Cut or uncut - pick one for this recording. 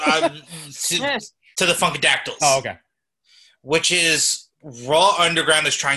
uncut